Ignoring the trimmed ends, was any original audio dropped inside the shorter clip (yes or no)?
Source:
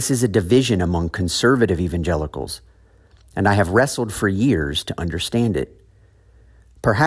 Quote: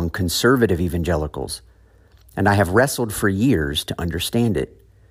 no